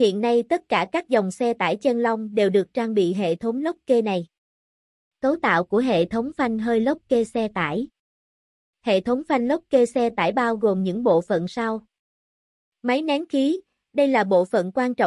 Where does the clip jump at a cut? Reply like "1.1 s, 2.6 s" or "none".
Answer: none